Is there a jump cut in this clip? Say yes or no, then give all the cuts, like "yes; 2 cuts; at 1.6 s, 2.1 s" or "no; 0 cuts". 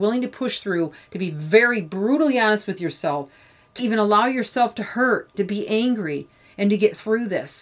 yes; 2 cuts; at 3.8 s, 5.3 s